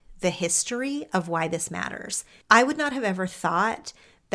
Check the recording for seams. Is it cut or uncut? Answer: uncut